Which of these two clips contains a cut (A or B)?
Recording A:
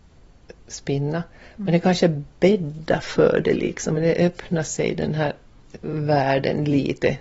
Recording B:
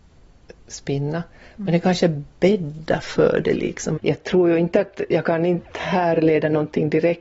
B